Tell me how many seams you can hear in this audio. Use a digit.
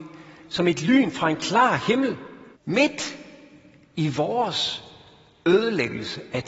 1